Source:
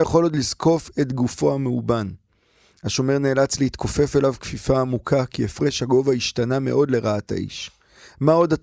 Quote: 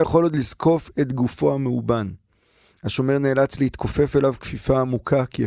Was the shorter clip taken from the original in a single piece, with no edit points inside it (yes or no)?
yes